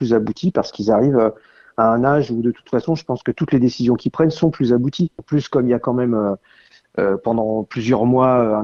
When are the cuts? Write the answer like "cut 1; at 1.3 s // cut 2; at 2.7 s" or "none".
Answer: none